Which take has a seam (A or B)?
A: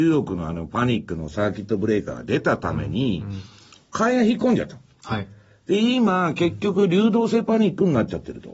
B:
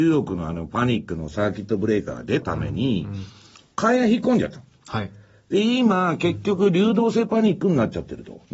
B